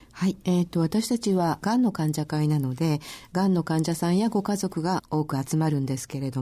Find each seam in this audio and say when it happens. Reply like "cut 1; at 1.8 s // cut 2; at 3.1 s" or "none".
none